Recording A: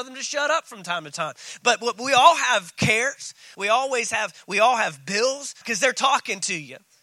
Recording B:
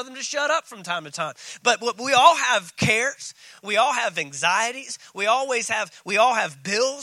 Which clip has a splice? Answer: A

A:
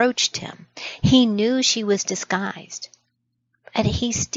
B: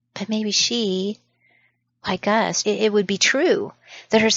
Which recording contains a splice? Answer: B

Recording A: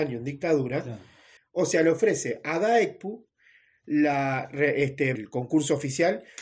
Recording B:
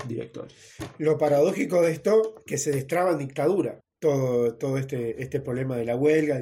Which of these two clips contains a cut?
A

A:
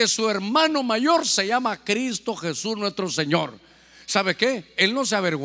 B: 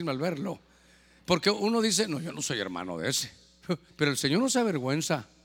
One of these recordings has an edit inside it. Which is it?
B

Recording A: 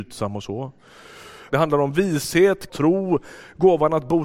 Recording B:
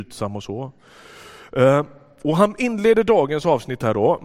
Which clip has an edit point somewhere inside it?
A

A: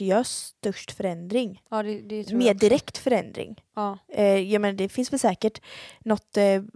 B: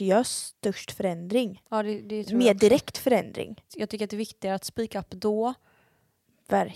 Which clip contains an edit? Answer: B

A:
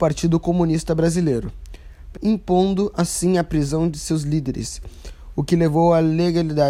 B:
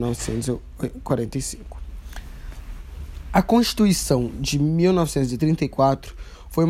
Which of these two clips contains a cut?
A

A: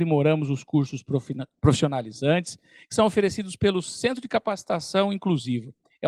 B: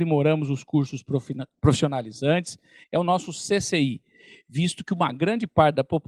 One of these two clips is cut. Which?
B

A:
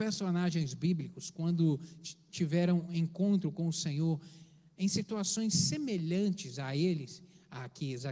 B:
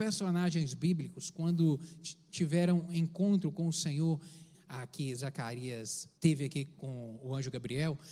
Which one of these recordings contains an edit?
B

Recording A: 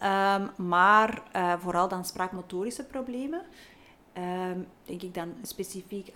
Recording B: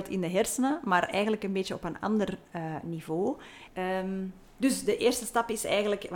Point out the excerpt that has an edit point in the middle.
A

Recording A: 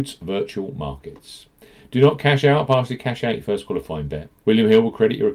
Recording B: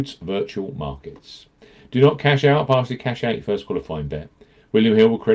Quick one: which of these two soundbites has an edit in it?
A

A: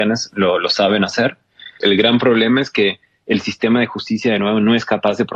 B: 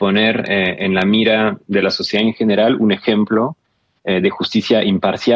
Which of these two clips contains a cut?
A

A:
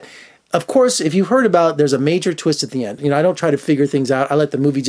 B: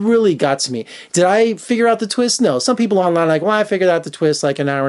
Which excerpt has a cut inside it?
A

